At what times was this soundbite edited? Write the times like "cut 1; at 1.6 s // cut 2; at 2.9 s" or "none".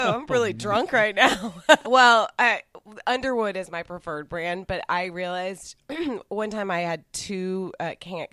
cut 1; at 1.8 s